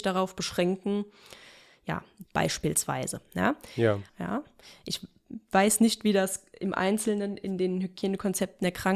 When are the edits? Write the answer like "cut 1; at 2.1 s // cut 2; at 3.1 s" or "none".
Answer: cut 1; at 2.2 s // cut 2; at 4.1 s